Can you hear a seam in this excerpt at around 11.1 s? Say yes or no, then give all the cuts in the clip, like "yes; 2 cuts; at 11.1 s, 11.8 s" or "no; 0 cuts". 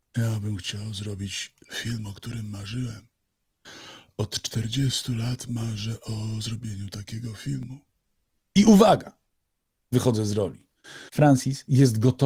yes; 1 cut; at 11.1 s